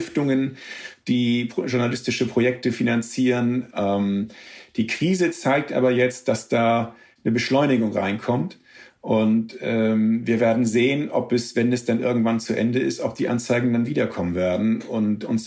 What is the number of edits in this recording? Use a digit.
1